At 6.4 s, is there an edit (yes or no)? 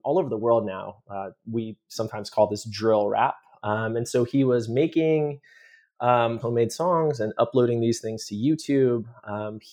yes